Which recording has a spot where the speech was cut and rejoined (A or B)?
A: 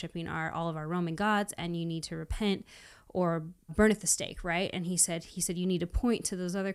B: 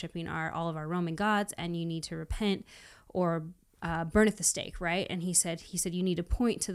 A